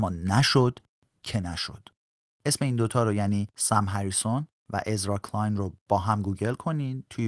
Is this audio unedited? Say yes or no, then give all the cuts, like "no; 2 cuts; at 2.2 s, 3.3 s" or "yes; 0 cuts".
no; 1 cut; at 2.2 s